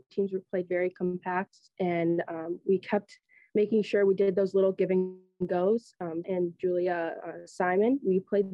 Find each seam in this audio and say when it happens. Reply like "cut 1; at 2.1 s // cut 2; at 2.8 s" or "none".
cut 1; at 6.2 s